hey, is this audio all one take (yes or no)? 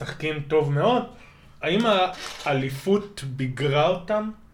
no